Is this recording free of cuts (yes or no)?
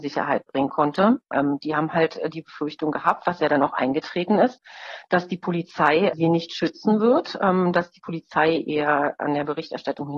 no